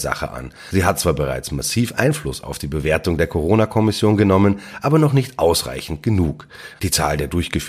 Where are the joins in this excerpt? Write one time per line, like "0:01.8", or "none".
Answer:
0:06.7

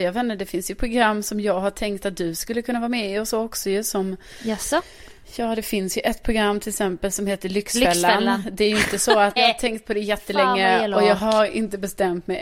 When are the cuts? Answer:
0:09.4

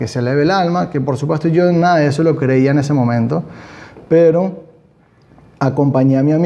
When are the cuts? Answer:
none

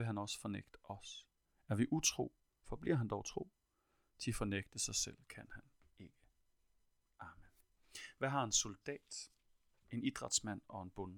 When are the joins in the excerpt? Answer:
none

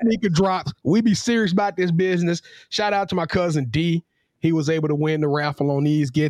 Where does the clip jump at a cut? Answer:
none

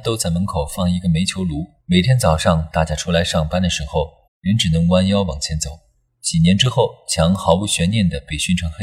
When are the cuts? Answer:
0:01.8
0:04.3

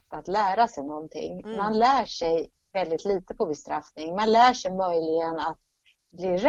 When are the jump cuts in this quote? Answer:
none

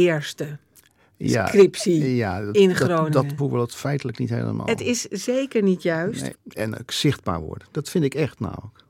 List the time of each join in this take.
0:03.4
0:06.3

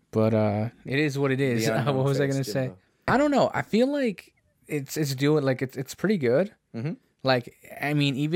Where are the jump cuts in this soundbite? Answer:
0:03.1

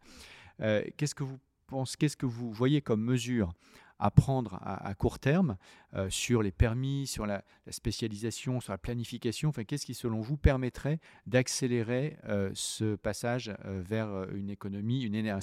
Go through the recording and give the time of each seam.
none

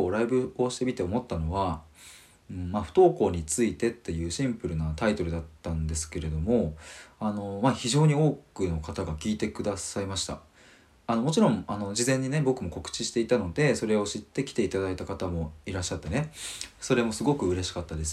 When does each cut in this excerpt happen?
none

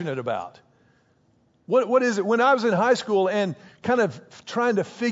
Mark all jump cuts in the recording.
none

